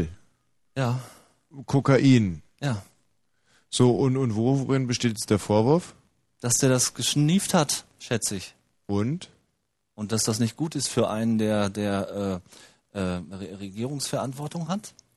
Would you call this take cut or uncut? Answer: uncut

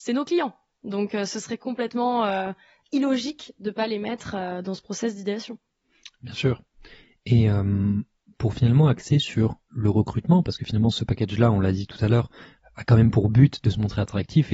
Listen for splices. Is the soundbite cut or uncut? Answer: uncut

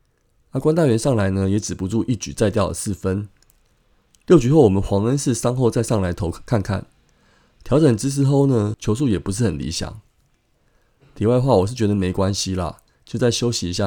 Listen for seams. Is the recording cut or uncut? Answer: cut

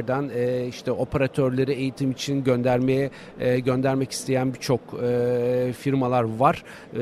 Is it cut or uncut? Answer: uncut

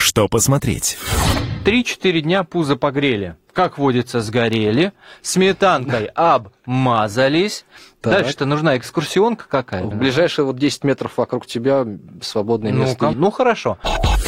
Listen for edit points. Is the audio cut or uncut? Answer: cut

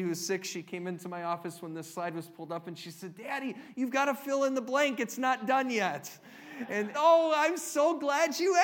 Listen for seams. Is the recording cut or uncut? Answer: cut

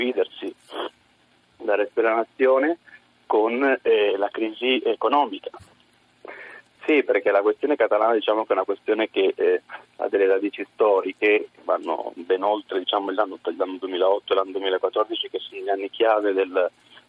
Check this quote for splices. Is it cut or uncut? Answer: cut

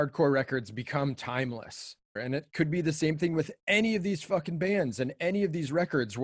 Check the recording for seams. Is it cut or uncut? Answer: cut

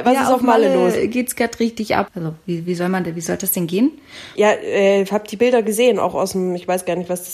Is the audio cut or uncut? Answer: cut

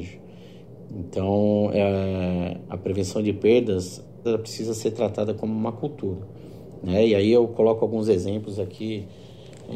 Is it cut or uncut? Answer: cut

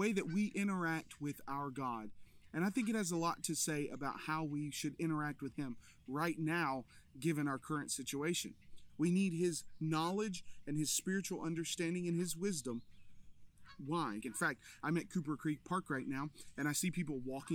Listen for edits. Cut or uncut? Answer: cut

